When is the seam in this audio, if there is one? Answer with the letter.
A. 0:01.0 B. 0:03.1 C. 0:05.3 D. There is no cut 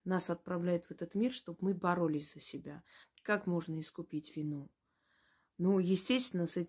B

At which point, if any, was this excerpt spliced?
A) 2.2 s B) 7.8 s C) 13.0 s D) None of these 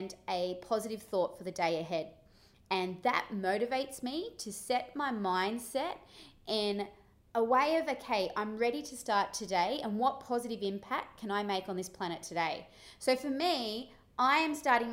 D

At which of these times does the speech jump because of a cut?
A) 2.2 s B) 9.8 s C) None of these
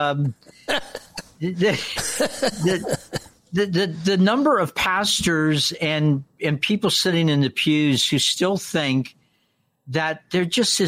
C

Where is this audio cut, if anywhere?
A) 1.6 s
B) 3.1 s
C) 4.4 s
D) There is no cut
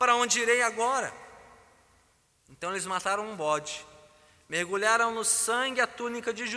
D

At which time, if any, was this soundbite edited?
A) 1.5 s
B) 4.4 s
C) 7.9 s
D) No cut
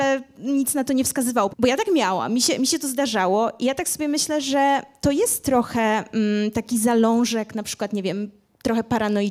A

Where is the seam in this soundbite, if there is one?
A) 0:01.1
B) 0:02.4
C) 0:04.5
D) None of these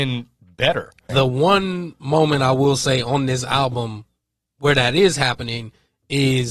A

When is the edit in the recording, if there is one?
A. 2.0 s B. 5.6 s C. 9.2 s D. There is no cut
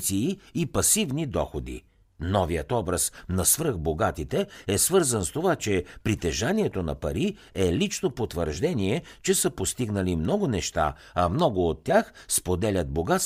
A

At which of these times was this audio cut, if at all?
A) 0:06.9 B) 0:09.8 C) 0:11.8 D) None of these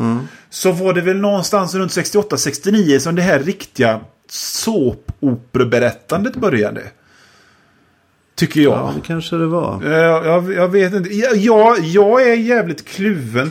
D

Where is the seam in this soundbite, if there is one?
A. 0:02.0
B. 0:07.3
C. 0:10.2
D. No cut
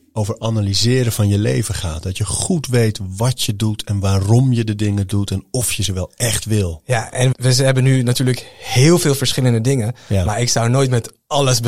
B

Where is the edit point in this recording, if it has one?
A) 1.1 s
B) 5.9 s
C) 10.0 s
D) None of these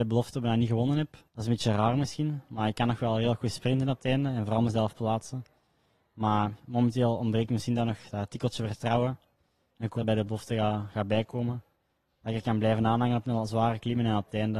C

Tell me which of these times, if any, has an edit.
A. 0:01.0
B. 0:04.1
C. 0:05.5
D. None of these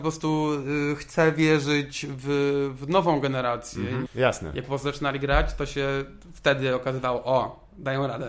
B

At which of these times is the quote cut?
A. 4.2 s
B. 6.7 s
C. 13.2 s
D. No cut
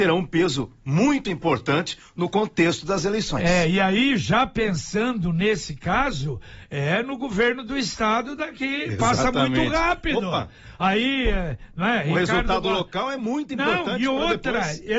D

